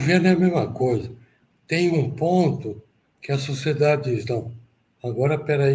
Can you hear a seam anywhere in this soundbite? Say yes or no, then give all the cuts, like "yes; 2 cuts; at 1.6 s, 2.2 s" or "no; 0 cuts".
no; 0 cuts